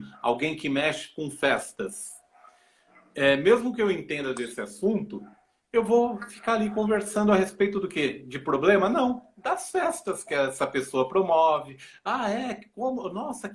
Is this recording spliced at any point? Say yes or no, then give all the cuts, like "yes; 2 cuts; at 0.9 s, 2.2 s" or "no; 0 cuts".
no; 0 cuts